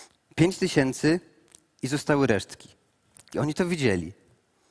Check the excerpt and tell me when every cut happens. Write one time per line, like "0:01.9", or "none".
0:03.3